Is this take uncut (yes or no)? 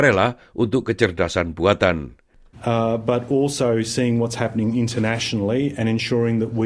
no